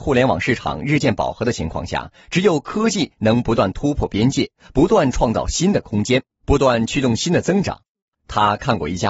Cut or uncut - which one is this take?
cut